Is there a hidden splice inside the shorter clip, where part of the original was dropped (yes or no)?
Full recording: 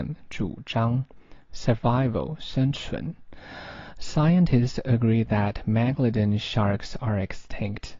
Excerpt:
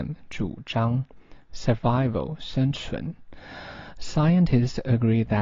no